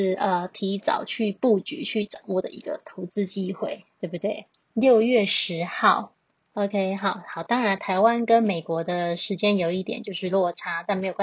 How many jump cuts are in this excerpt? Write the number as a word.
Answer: one